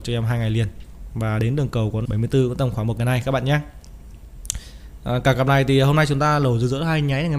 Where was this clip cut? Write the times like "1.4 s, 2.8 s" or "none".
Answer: 2.1 s